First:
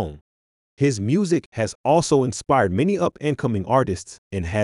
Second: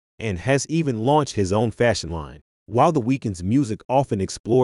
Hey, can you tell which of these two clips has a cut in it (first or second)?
second